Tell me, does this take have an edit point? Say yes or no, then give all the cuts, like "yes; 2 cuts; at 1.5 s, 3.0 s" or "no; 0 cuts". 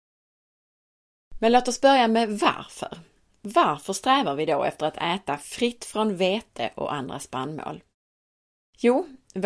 no; 0 cuts